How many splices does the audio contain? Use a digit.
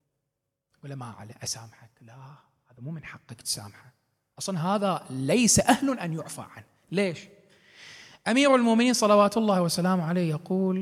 0